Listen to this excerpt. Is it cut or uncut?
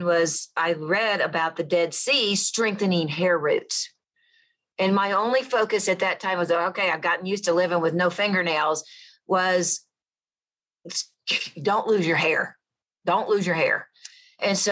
uncut